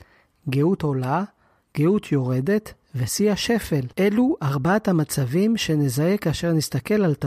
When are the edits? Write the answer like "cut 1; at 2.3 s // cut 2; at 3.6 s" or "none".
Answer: cut 1; at 1.6 s // cut 2; at 3.9 s